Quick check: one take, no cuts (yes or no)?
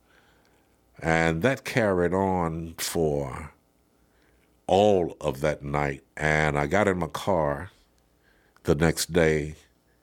no